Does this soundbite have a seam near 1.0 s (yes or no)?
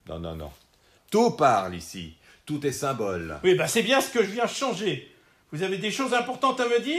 yes